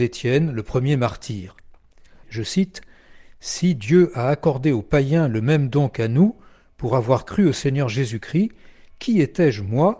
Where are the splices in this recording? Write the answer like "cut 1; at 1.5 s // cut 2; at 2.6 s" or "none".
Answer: cut 1; at 2.2 s